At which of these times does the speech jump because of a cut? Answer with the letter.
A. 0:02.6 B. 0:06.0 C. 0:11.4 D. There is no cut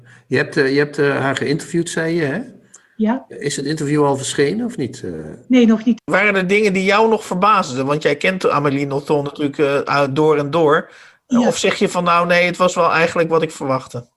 B